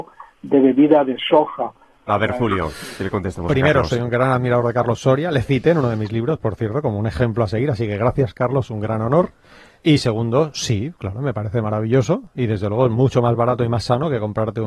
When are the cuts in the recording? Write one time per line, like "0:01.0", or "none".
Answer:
0:02.1